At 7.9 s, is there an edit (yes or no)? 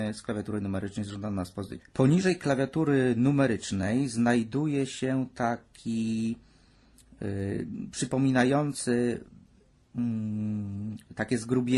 no